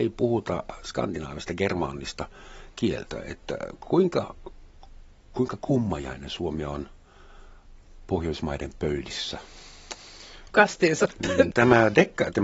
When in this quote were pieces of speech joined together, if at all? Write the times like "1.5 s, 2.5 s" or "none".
10.5 s, 11.5 s